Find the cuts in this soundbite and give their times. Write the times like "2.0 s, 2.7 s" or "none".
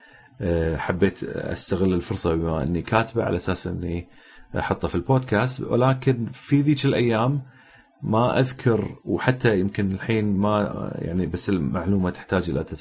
none